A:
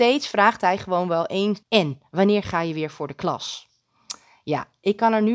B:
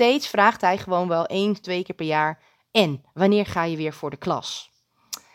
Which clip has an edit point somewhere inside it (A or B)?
A